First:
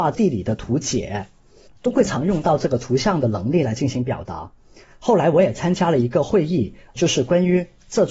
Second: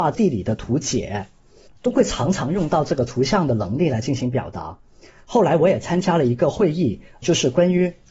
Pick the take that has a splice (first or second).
first